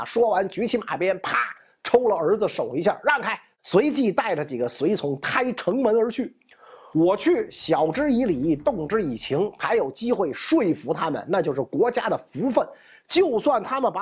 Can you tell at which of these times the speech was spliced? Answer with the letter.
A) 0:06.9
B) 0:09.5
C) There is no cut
A